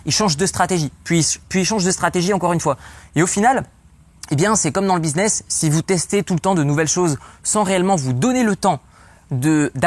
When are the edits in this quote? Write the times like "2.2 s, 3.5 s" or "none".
none